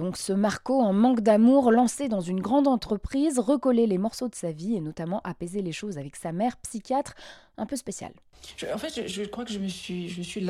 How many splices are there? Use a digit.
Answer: 0